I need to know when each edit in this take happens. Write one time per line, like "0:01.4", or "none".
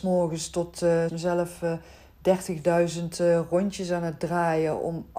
0:01.1

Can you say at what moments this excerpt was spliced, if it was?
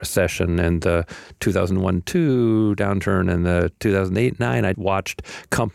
0:04.7

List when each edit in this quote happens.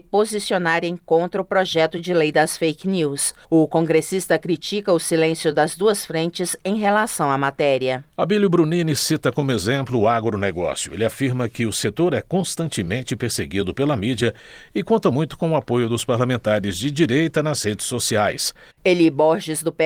0:03.4
0:18.7

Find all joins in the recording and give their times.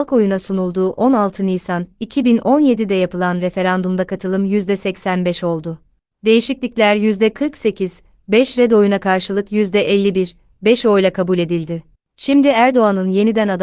0:11.9

